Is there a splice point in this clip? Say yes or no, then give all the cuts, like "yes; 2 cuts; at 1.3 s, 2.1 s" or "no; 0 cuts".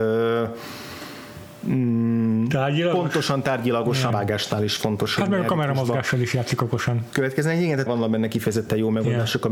yes; 2 cuts; at 4.1 s, 7.9 s